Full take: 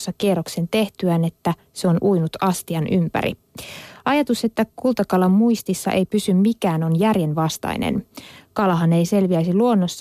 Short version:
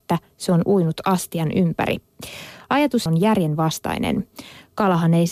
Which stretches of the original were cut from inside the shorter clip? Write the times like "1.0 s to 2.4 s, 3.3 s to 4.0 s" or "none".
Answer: 4.4 s to 6.8 s